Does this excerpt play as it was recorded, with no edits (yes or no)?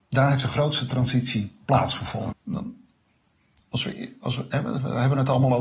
no